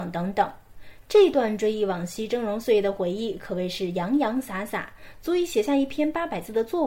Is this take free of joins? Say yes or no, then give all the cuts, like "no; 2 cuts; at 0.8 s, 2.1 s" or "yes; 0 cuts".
yes; 0 cuts